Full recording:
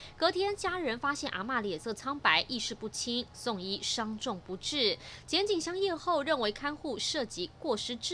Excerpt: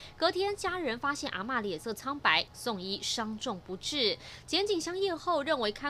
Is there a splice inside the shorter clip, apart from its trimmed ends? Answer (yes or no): yes